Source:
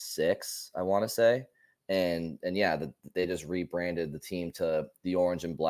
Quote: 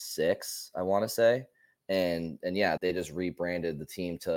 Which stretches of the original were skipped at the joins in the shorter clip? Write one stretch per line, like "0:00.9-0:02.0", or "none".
0:02.8-0:03.1

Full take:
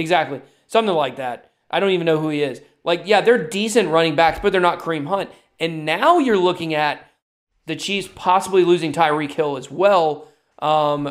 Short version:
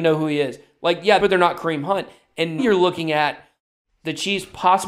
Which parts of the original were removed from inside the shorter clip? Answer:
0:03.2-0:04.4
0:05.8-0:06.2

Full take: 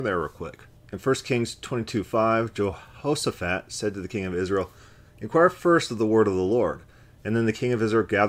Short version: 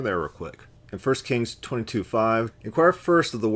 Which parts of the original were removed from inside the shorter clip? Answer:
0:02.5-0:05.1

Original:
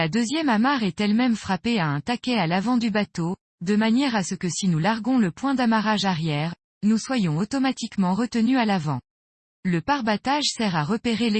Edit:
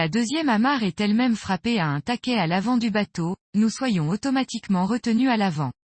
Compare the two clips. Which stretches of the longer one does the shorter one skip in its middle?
0:03.4-0:06.7

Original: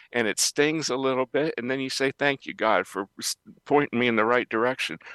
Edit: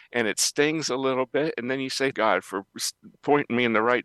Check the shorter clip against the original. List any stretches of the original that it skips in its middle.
0:02.1-0:02.6

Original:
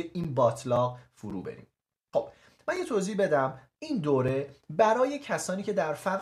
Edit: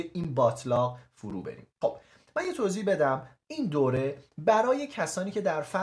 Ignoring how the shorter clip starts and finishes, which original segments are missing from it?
0:01.7-0:02.0

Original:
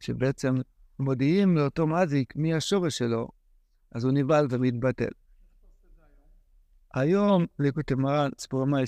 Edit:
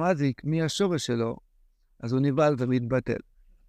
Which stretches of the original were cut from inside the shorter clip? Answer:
none

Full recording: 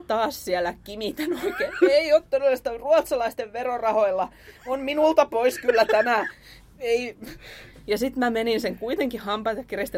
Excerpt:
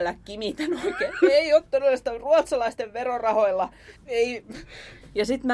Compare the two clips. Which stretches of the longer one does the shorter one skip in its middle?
0:04.5-0:06.7

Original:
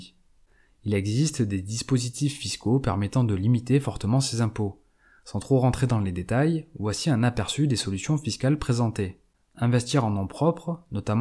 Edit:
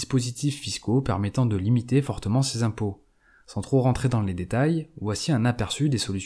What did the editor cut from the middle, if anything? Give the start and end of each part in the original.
none

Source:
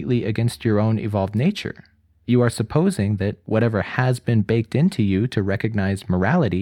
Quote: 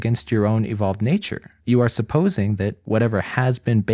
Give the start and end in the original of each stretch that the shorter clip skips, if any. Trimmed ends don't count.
0:01.9-0:02.2

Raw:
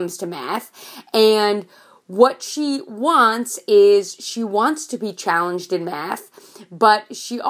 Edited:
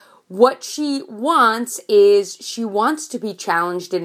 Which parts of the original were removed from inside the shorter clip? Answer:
none

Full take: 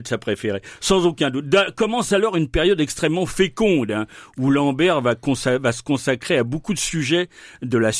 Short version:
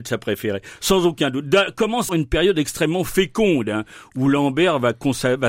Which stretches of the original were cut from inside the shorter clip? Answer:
0:02.1-0:02.3

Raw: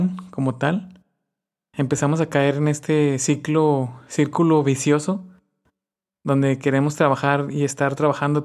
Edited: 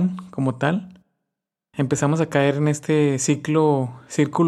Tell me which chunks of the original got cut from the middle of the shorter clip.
none

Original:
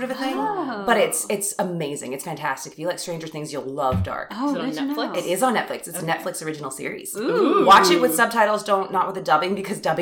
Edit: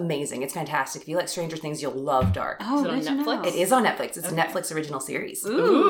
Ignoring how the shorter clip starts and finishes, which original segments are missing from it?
none

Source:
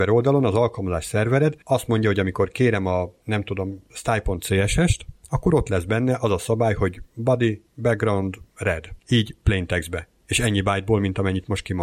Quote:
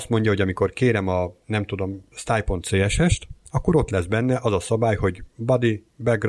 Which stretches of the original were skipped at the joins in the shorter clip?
none

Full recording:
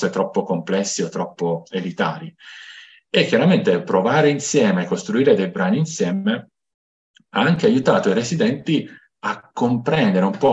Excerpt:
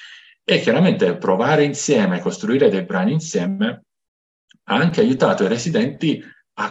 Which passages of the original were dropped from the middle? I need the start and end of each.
none

